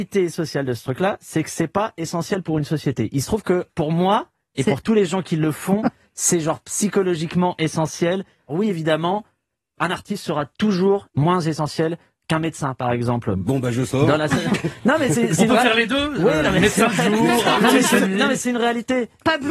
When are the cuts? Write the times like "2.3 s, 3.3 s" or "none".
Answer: 3.7 s, 8.5 s